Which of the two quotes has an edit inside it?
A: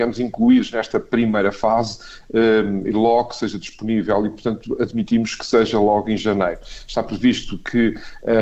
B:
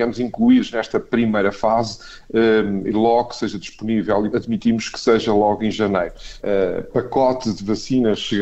B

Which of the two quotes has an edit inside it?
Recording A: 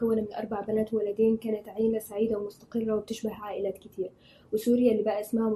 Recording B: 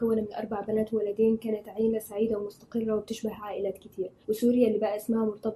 B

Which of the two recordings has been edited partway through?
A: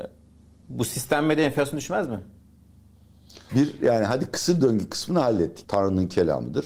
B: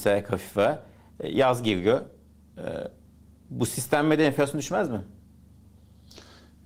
A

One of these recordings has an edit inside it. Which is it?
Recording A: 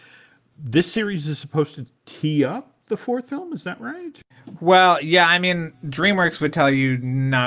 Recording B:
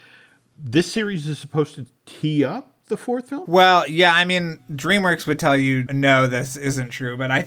B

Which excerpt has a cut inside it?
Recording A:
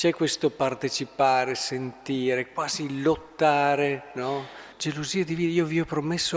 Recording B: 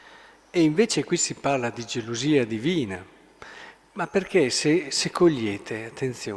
A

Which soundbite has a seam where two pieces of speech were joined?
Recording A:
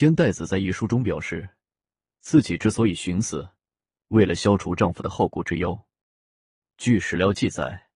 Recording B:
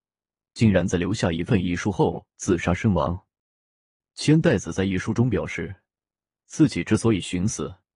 A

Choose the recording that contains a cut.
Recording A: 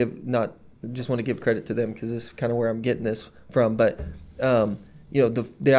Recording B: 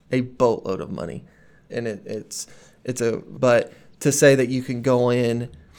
B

